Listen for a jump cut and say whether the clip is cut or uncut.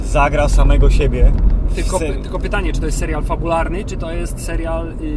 uncut